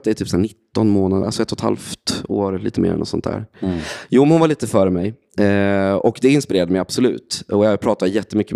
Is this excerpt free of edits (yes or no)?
yes